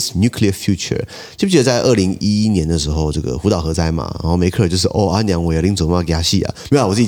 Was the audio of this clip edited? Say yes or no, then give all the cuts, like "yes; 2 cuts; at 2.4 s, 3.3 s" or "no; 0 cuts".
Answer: no; 0 cuts